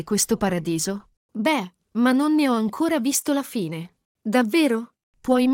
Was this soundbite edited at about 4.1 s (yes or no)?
no